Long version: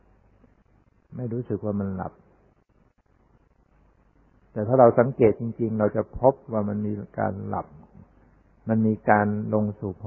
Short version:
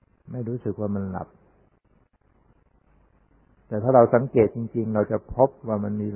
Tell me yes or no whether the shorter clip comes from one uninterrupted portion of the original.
yes